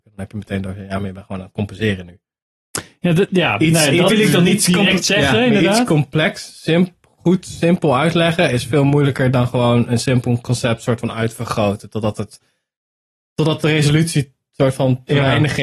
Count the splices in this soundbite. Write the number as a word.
one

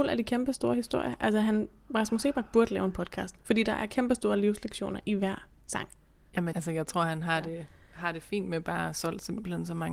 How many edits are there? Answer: one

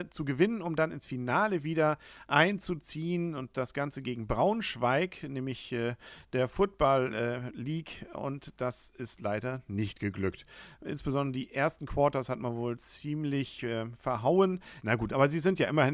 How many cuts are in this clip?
one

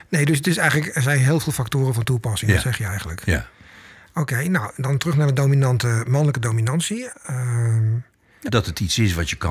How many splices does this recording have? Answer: two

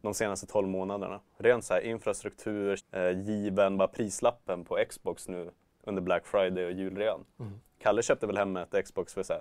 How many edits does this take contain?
one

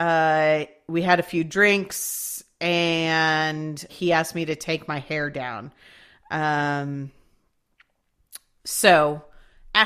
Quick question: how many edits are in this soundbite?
one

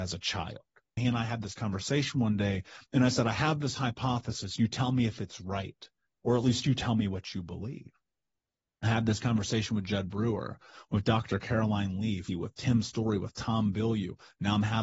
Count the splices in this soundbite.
two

